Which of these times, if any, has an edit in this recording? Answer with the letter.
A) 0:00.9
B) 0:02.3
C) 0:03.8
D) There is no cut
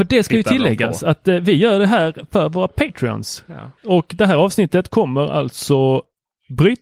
C